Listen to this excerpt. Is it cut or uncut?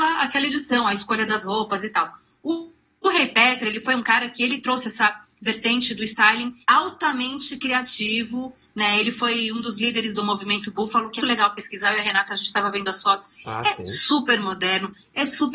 cut